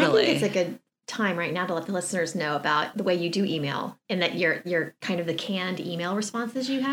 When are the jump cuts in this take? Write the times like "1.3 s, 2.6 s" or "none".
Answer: 2.9 s